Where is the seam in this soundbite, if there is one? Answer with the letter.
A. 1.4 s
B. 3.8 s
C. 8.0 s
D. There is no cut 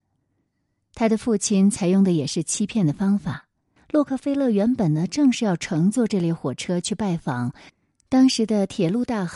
B